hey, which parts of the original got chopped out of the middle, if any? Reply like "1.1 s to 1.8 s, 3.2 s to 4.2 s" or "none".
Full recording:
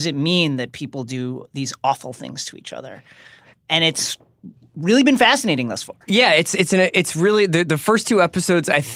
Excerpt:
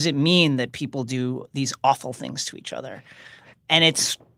none